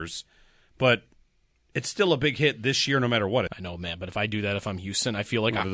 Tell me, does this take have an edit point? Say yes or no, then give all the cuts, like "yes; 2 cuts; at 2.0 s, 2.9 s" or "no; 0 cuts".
yes; 1 cut; at 3.5 s